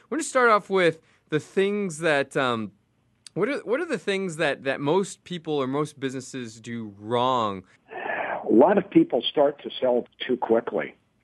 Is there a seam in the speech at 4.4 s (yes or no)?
no